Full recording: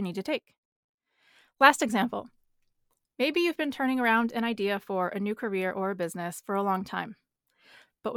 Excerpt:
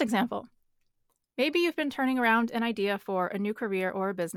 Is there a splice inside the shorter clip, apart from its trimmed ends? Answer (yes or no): no